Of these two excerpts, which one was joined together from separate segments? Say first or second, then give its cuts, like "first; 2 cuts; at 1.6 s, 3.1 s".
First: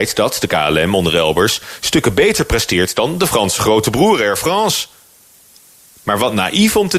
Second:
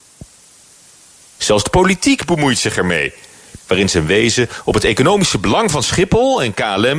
second; 2 cuts; at 1.4 s, 3.6 s